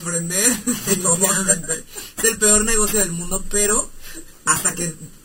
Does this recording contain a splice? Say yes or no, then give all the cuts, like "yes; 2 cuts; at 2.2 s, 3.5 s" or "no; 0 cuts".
no; 0 cuts